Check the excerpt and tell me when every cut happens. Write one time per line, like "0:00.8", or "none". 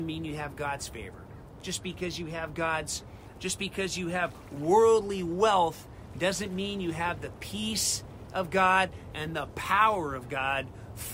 0:03.3